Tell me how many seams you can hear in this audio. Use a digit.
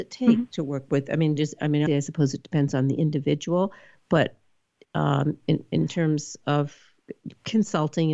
1